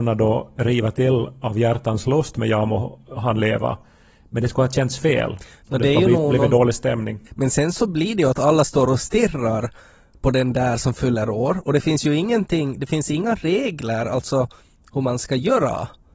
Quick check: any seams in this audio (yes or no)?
yes